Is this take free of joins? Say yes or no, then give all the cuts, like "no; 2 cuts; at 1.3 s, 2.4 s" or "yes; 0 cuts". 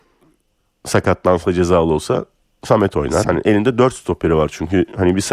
no; 1 cut; at 3.2 s